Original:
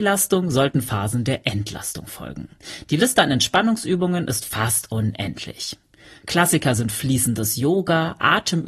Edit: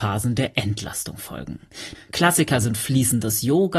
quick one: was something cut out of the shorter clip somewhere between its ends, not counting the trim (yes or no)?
yes